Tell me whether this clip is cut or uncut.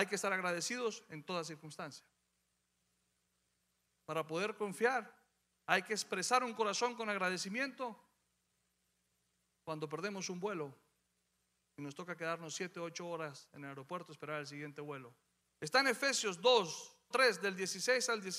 cut